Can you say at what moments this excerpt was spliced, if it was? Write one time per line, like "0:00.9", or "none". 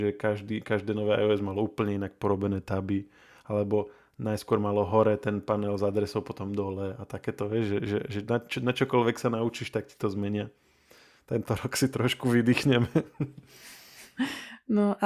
none